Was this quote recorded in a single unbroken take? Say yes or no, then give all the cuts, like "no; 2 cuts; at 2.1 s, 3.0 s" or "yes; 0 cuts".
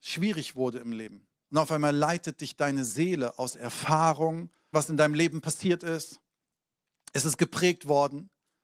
no; 2 cuts; at 1.5 s, 4.7 s